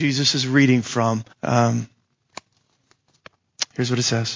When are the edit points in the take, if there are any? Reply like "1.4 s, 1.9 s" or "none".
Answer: 1.3 s

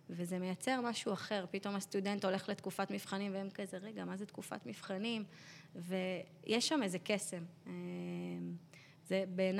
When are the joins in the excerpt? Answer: none

